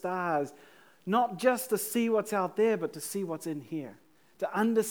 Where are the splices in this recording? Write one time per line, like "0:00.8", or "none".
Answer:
none

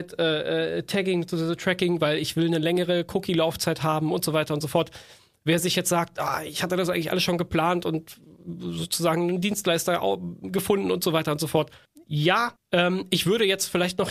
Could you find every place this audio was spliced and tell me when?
none

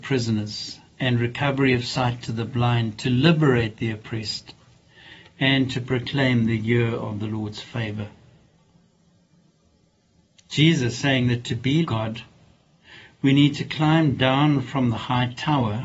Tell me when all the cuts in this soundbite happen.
0:11.8

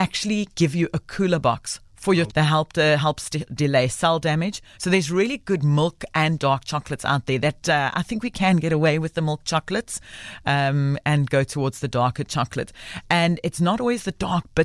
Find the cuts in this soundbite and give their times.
0:02.3
0:04.8

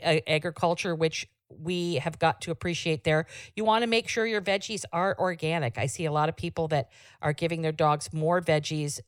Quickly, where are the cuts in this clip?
none

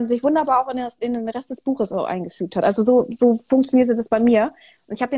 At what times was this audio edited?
none

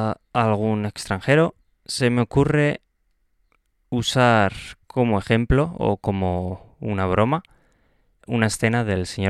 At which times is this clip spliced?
0:08.2

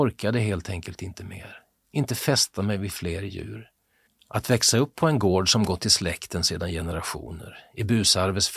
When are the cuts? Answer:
0:04.1

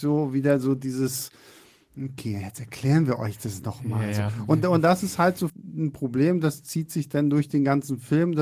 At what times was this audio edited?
0:05.5

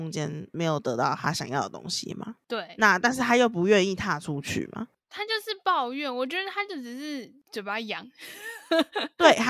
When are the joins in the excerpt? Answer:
none

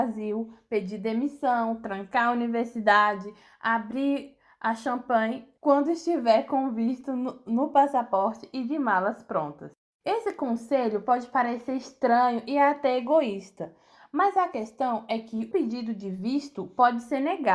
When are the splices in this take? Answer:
0:15.5

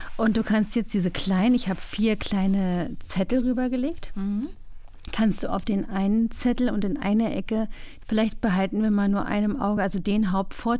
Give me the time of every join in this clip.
none

